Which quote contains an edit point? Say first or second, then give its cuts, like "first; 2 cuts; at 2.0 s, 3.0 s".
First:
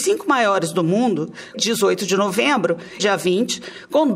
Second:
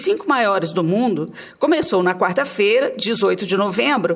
first; 2 cuts; at 1.5 s, 3.0 s